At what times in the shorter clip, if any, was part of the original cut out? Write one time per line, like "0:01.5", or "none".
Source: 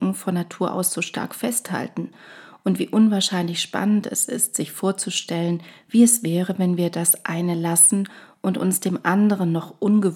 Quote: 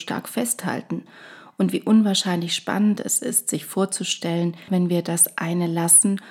0:04.7